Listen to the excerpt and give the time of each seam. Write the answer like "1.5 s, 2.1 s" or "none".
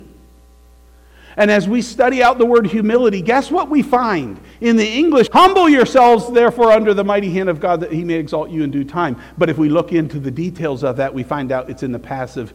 5.3 s

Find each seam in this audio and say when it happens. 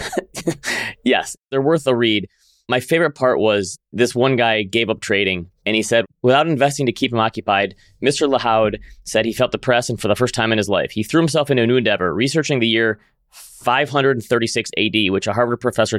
none

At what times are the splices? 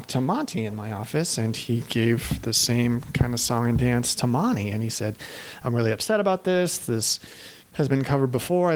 7.6 s

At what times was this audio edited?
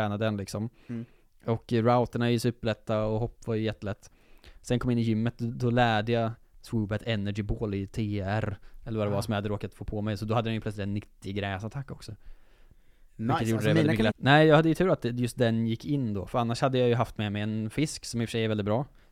14.1 s

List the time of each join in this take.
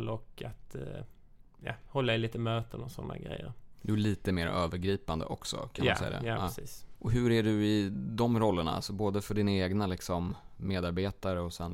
7.0 s

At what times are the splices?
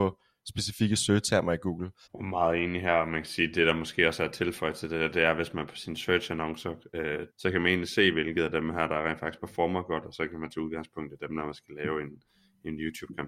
2.0 s, 7.3 s

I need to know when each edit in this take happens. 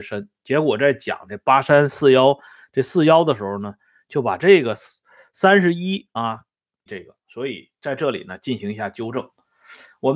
6.9 s

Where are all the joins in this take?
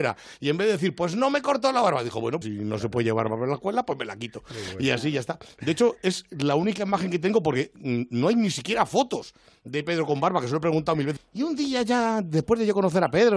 2.4 s, 11.2 s

